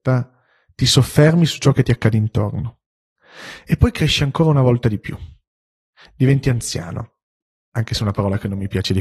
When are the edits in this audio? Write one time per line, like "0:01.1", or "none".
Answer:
none